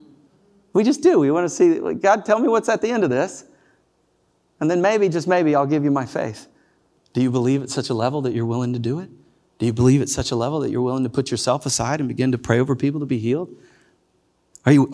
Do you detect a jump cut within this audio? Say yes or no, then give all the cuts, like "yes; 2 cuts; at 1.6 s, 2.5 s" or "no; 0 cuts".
yes; 1 cut; at 7.0 s